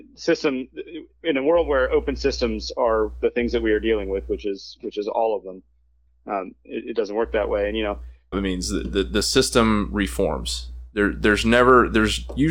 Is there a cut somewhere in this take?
yes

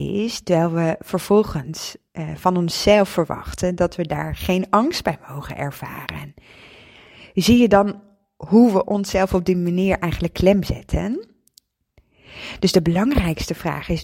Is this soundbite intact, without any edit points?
yes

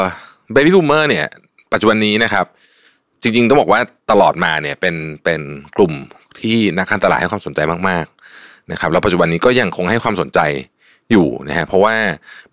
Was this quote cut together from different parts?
no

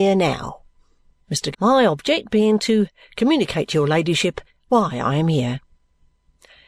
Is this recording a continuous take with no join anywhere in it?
no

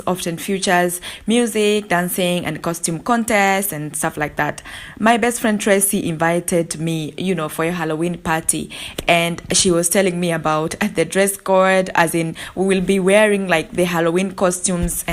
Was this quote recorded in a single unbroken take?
yes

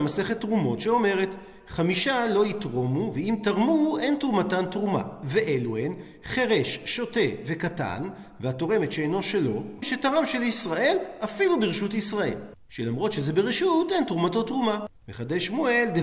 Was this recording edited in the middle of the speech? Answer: yes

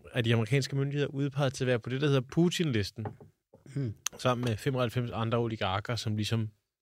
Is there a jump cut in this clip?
no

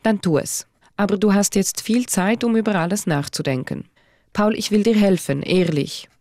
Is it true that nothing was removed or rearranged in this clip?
yes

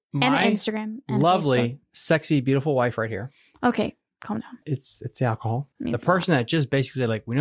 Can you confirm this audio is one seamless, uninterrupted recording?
no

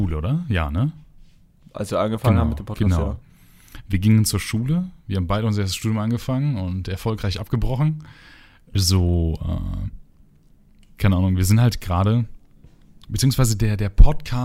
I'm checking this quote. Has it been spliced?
yes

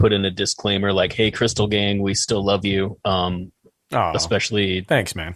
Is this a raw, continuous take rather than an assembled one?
yes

